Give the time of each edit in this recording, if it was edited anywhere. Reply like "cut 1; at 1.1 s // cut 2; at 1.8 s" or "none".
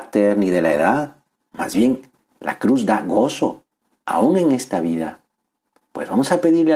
cut 1; at 1.3 s